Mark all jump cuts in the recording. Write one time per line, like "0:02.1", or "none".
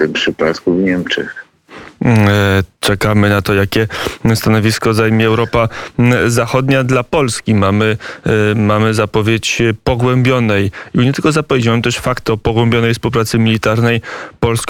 none